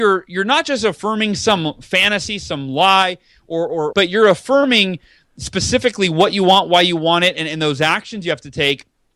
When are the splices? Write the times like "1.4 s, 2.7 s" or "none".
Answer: 3.9 s